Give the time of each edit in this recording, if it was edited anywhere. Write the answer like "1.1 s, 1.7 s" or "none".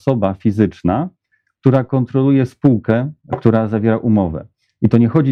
none